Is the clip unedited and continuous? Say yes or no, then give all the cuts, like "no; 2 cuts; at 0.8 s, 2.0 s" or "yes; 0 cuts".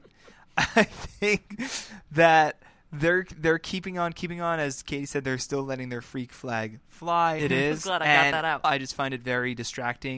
no; 2 cuts; at 7.4 s, 8.6 s